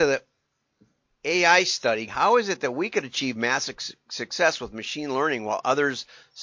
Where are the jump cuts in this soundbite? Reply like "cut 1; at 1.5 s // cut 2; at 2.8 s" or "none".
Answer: cut 1; at 2.1 s